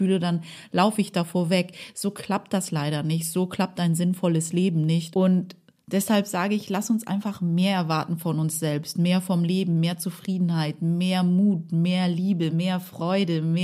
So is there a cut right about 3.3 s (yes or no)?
no